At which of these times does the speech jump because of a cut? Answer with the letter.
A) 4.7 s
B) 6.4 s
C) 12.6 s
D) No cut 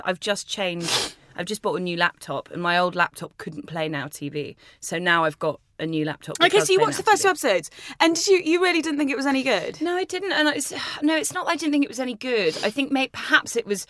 D